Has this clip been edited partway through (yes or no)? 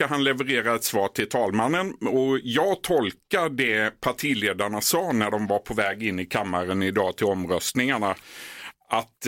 no